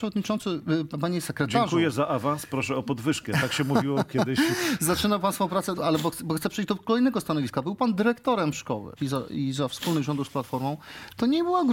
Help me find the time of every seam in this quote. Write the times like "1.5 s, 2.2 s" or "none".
5.7 s, 9.0 s